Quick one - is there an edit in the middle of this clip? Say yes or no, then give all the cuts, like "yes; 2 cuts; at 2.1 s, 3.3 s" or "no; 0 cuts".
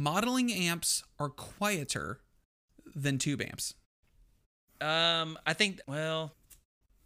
yes; 1 cut; at 5.8 s